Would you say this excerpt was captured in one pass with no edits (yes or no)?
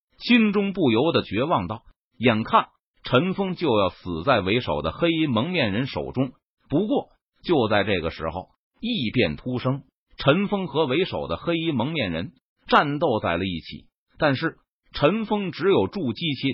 no